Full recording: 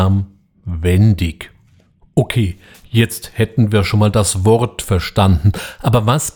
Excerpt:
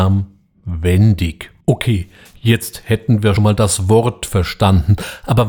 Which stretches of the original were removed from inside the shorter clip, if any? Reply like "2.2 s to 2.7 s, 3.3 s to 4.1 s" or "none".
1.6 s to 2.1 s, 3.9 s to 3.9 s